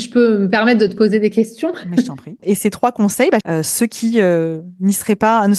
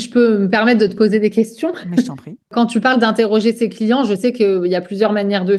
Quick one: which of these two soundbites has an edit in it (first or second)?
first